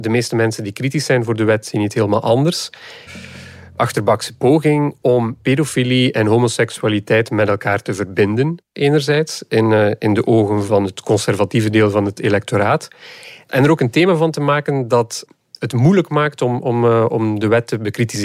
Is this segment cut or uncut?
cut